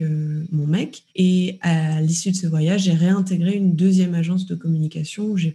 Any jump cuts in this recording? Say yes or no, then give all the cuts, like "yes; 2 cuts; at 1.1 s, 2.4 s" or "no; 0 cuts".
no; 0 cuts